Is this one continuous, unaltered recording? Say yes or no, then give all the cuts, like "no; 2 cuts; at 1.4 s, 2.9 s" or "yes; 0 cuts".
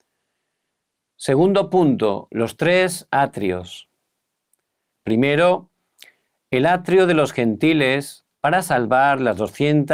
no; 2 cuts; at 4.9 s, 8.3 s